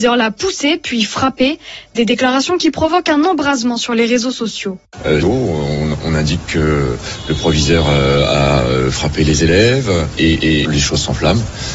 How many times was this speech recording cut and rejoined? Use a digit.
2